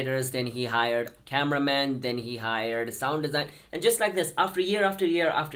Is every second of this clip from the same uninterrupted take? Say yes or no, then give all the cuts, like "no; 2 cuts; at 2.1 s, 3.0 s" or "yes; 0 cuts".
yes; 0 cuts